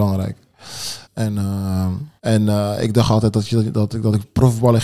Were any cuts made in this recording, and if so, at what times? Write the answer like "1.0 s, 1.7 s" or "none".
1.0 s, 2.2 s